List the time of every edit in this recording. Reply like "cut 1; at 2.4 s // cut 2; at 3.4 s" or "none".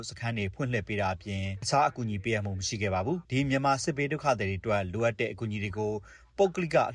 cut 1; at 3.2 s